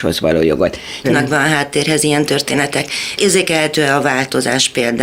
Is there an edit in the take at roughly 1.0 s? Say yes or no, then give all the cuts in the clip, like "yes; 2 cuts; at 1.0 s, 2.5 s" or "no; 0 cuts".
yes; 1 cut; at 1.0 s